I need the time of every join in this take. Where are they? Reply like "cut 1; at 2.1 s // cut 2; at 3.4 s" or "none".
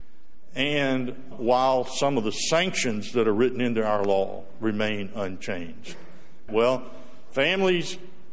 cut 1; at 1.3 s // cut 2; at 6.5 s